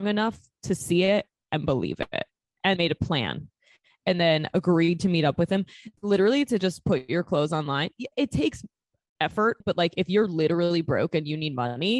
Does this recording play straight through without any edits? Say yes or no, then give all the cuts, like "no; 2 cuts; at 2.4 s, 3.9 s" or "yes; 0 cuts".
no; 3 cuts; at 2.8 s, 6.0 s, 9.6 s